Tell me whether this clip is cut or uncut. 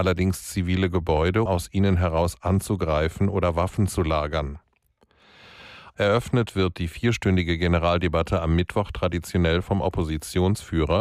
cut